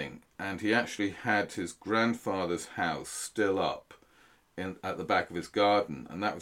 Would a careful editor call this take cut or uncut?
uncut